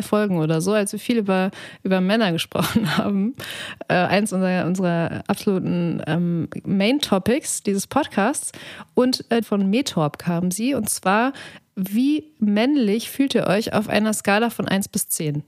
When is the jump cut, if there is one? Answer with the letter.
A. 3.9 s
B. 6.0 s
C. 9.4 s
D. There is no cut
C